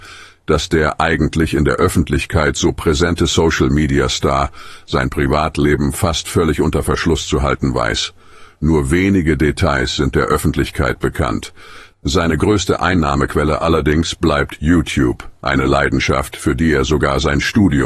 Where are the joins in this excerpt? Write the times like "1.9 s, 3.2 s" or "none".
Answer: 11.9 s